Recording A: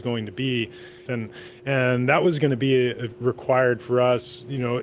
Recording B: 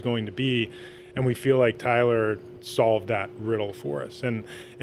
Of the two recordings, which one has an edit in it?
A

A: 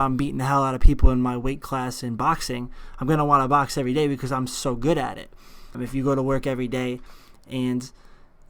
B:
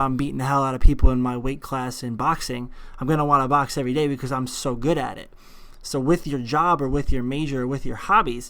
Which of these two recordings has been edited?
A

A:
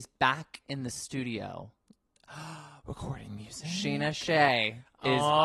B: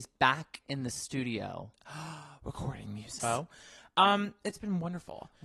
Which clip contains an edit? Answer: B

